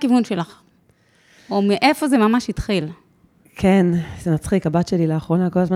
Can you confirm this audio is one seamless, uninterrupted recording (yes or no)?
yes